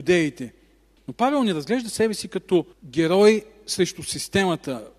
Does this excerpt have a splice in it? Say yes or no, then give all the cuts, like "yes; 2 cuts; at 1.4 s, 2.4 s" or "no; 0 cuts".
yes; 2 cuts; at 1.0 s, 2.7 s